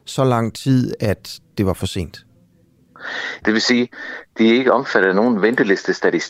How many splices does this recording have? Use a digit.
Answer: 1